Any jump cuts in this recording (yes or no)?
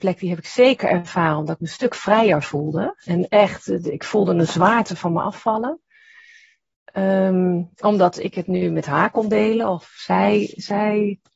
yes